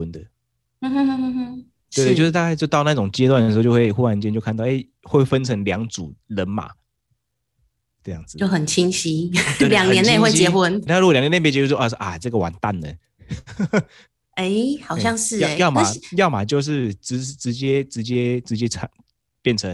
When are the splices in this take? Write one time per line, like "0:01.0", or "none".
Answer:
0:10.9